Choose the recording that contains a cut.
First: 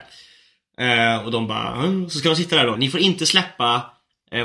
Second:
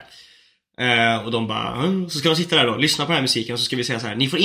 first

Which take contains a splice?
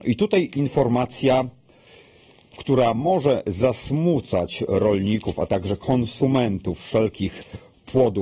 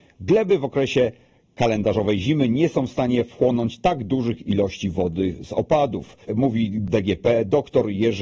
second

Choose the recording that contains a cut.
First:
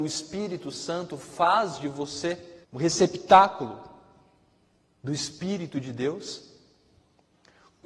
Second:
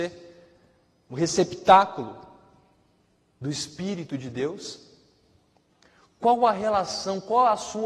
first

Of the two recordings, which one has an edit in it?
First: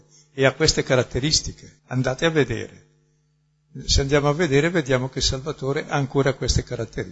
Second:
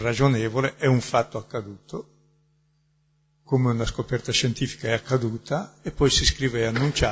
first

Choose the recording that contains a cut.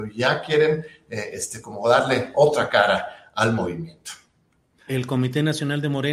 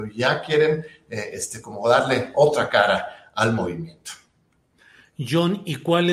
first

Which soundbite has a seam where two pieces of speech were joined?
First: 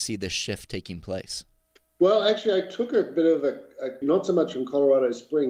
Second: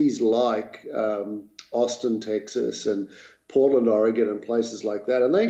first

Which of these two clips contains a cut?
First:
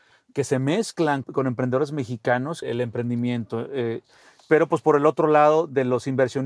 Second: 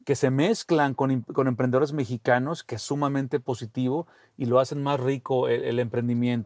first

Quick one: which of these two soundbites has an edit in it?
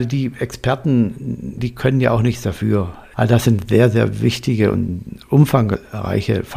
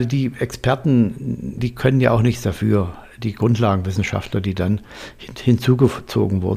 first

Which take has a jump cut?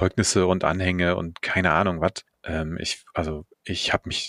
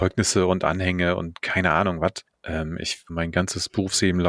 second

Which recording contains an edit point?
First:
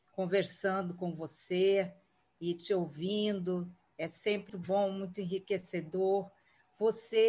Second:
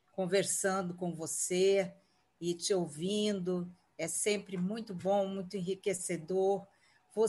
first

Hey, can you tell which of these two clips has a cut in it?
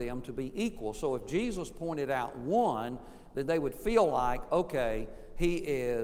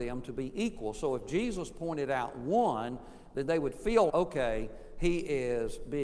second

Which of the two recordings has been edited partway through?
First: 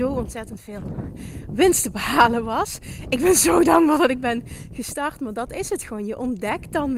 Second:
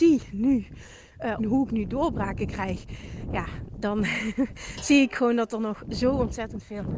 second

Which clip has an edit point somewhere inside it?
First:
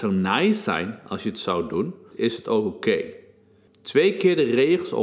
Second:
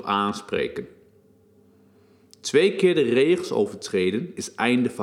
first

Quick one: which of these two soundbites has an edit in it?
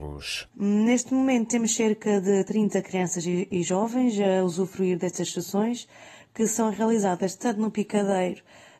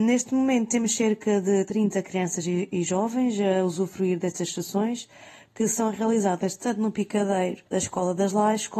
second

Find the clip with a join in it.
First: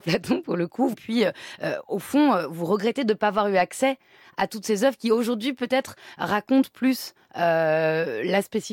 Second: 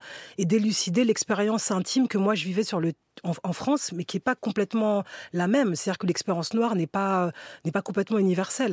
first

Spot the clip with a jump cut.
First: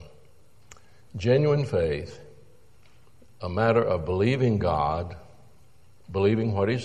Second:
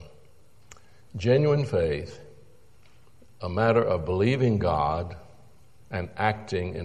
second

